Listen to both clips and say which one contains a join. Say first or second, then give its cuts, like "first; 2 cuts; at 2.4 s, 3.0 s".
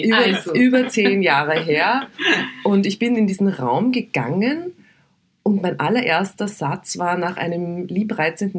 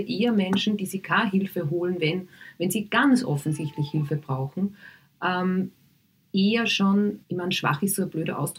second; 1 cut; at 7.2 s